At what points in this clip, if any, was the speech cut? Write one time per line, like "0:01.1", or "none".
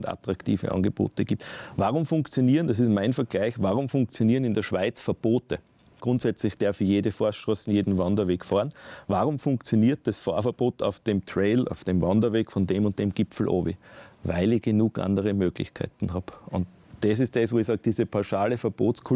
0:06.0